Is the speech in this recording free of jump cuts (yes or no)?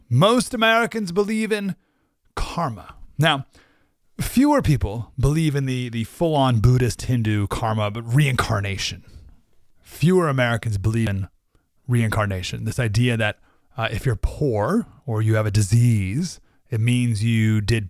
yes